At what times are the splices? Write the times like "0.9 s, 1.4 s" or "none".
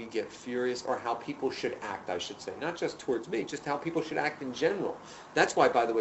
none